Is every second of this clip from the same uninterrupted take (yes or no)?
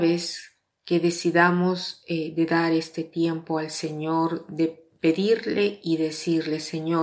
yes